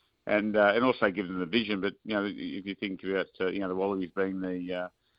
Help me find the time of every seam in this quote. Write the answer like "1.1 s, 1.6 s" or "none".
none